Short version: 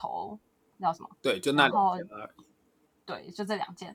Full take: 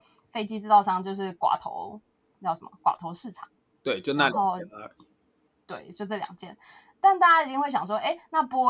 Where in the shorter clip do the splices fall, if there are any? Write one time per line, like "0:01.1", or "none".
0:01.1